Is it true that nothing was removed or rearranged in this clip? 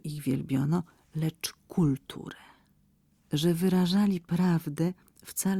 yes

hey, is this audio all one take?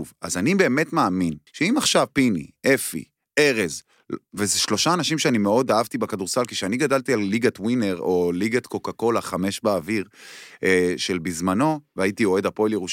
no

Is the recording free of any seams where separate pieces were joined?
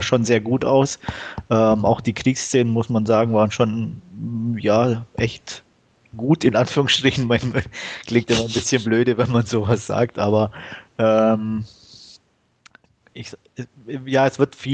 yes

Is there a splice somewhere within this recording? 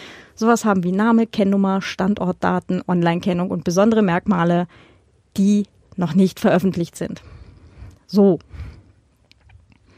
no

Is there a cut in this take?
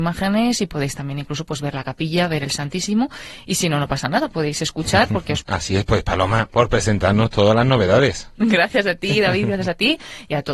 yes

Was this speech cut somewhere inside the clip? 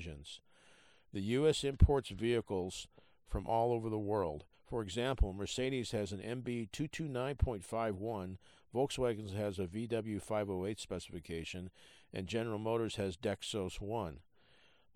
yes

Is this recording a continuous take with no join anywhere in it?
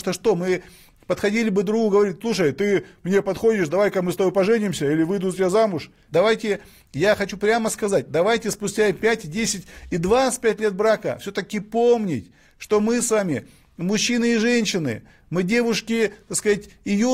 no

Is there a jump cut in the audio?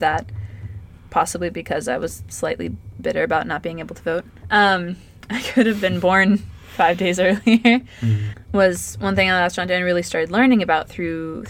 no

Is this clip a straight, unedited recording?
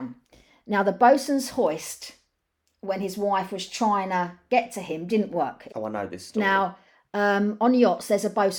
no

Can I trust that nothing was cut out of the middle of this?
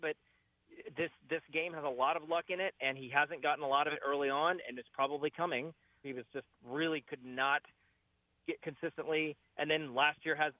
no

